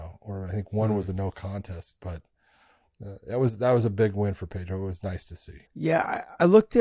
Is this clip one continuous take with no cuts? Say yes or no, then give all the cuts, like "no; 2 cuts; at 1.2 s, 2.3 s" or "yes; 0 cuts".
no; 1 cut; at 5.7 s